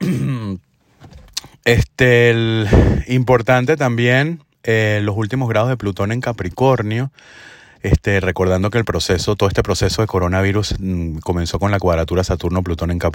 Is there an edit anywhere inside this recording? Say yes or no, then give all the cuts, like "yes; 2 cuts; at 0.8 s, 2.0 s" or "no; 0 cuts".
no; 0 cuts